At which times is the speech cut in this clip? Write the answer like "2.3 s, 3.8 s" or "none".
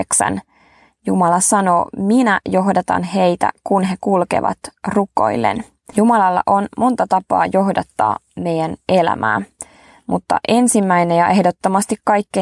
5.9 s